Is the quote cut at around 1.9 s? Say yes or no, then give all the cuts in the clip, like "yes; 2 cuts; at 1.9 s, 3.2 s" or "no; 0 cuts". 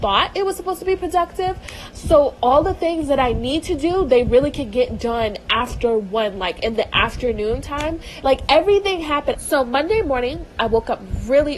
yes; 3 cuts; at 1.9 s, 8.2 s, 9.3 s